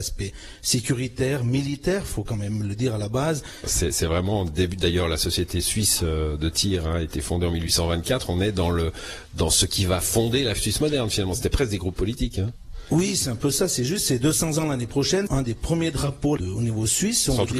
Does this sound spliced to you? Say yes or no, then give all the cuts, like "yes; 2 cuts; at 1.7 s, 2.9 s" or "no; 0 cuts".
yes; 3 cuts; at 3.6 s, 15.3 s, 16.4 s